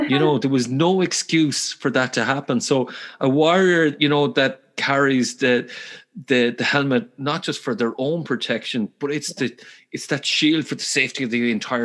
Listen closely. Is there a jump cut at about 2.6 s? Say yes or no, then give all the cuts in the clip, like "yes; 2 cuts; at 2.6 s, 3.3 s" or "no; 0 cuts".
no; 0 cuts